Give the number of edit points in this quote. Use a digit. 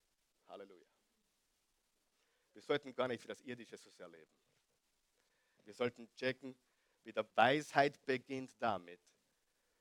1